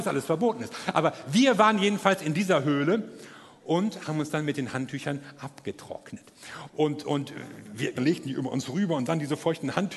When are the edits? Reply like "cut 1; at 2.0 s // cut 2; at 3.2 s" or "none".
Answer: cut 1; at 6.7 s // cut 2; at 8.0 s